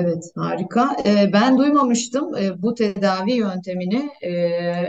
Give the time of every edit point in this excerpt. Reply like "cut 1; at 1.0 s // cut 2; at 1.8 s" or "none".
none

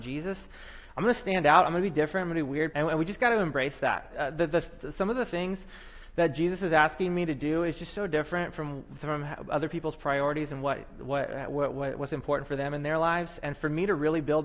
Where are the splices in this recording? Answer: cut 1; at 2.7 s // cut 2; at 4.1 s

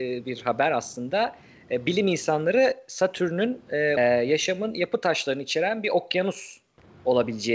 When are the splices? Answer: cut 1; at 4.0 s

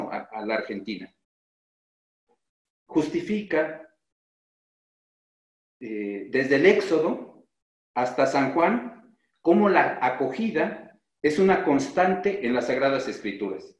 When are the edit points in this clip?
cut 1; at 2.7 s

